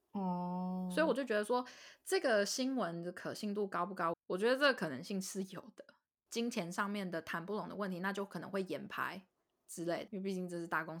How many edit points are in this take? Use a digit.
3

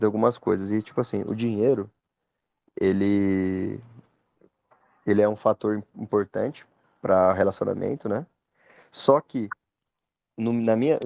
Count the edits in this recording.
0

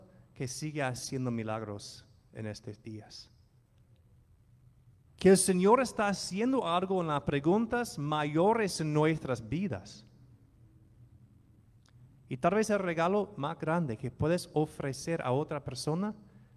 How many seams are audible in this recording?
1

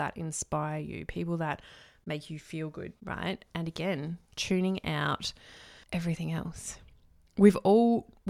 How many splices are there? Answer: 2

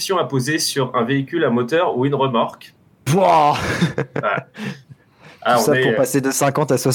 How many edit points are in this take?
1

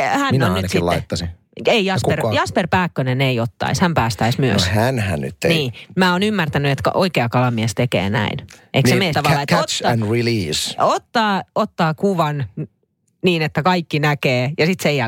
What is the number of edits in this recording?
1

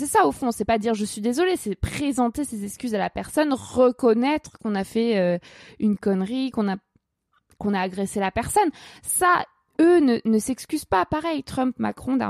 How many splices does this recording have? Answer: 0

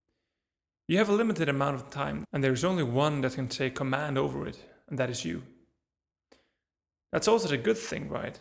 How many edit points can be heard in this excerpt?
1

